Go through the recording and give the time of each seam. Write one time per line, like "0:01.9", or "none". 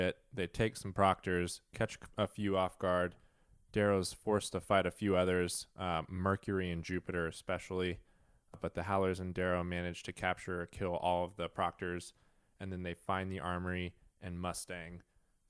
none